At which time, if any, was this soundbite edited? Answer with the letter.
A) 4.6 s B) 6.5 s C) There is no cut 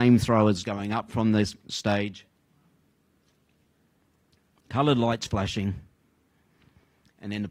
C